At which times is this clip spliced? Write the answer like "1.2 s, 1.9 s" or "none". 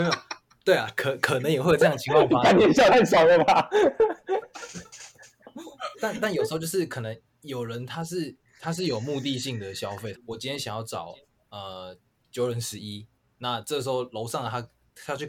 5.9 s, 10.1 s